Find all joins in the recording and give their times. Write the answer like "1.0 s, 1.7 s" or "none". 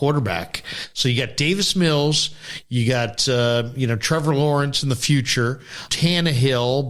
5.9 s